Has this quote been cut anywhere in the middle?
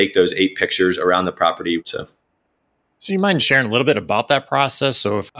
yes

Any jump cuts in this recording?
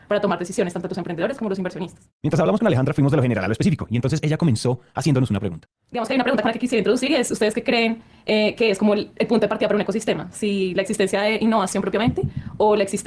no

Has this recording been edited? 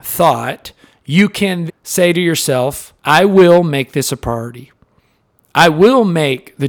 yes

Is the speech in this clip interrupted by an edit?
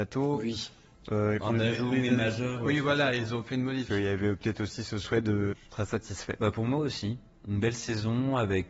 yes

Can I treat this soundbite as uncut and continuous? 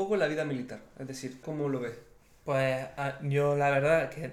no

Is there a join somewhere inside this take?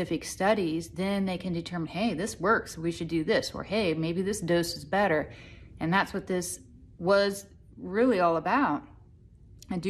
no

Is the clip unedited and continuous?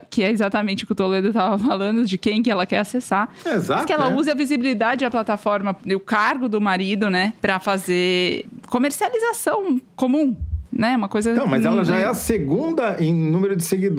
yes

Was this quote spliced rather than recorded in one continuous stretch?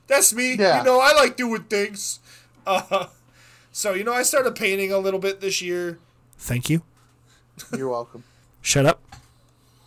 yes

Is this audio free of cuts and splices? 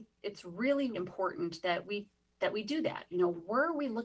no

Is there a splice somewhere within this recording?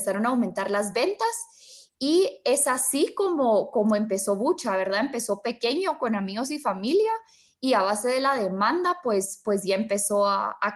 no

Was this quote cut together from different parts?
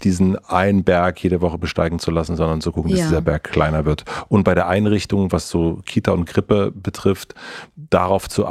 no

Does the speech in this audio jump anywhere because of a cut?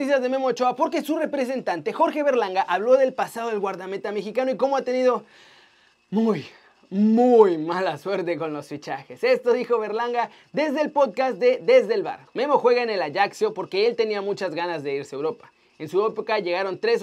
no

